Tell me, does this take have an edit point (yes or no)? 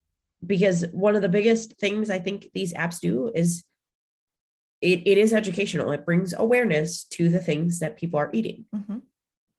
yes